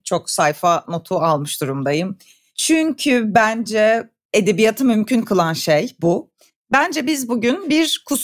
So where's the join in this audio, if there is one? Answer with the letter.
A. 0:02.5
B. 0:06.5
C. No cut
C